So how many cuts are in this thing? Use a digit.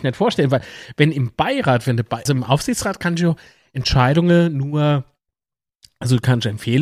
1